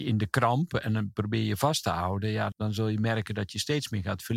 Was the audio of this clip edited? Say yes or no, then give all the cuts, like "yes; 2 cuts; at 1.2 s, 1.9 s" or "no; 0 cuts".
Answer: yes; 1 cut; at 2.5 s